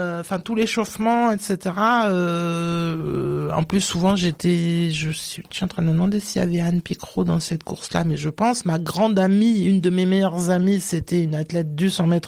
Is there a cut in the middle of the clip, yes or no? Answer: no